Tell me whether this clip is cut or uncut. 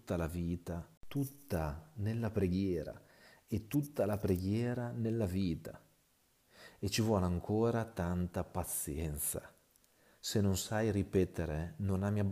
uncut